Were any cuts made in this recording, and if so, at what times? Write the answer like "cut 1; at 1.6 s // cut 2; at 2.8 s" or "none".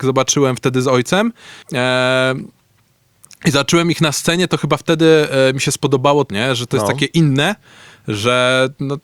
cut 1; at 1.6 s // cut 2; at 6.3 s